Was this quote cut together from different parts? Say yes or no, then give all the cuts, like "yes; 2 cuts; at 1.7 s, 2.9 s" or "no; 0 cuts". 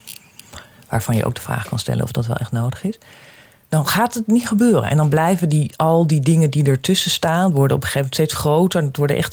no; 0 cuts